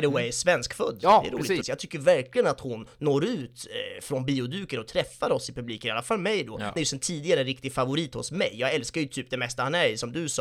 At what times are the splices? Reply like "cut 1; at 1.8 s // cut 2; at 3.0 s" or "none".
cut 1; at 1.6 s // cut 2; at 6.8 s